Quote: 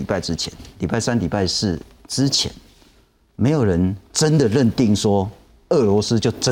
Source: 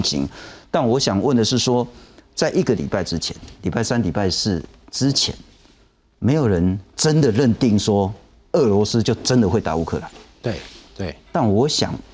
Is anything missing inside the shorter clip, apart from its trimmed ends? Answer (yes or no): no